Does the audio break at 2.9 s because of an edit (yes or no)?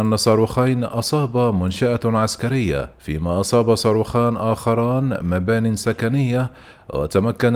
yes